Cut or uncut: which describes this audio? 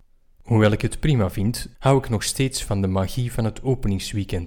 cut